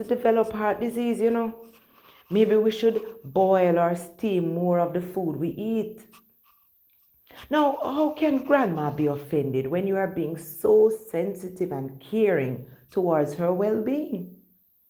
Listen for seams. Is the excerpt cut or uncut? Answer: uncut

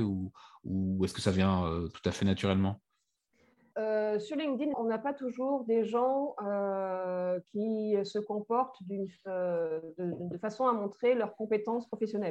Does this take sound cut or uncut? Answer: cut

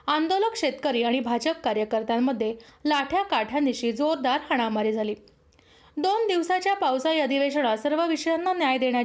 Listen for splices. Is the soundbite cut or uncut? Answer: uncut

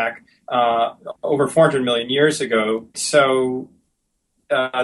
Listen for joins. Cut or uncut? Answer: cut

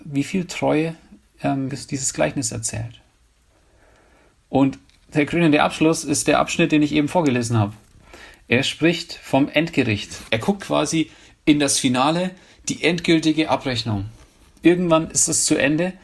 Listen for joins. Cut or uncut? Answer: cut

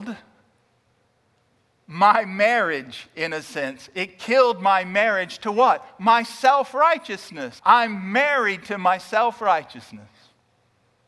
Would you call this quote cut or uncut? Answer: cut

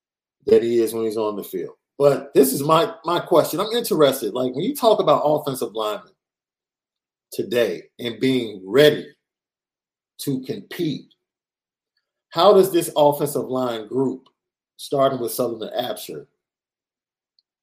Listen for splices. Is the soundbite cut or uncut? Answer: uncut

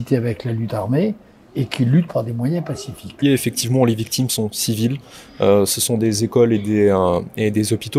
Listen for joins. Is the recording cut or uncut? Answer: cut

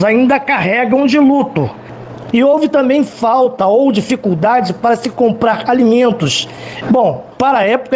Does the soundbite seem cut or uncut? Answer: cut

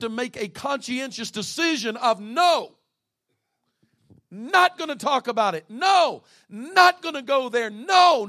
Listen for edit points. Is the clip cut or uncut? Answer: uncut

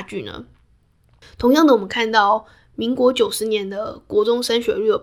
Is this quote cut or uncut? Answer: uncut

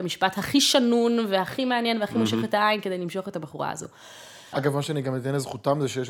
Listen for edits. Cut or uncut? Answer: cut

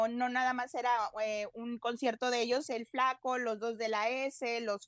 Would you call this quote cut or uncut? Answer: cut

